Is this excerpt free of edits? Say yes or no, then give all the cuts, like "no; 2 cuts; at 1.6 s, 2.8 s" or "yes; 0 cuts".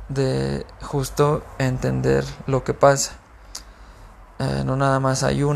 yes; 0 cuts